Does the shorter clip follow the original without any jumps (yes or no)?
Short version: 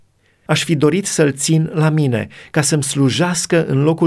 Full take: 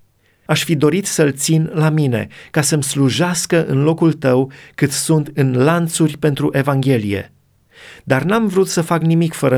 yes